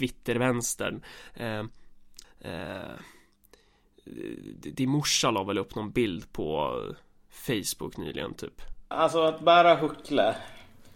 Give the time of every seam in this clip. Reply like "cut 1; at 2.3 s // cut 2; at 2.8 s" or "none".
cut 1; at 2.2 s // cut 2; at 8.9 s